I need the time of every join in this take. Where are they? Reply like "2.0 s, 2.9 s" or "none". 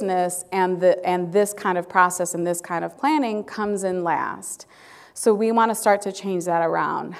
none